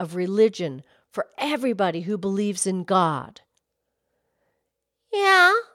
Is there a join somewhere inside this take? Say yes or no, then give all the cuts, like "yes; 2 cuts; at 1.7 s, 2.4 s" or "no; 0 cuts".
no; 0 cuts